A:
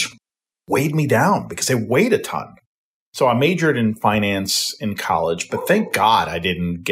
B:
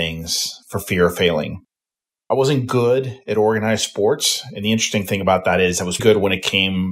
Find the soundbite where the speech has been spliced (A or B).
B